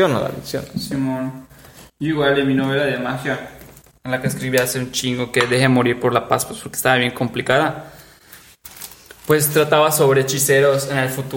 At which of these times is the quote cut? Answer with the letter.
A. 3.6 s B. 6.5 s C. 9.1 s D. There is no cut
D